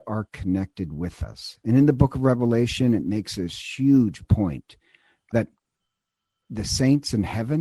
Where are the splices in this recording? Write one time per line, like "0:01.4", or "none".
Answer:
none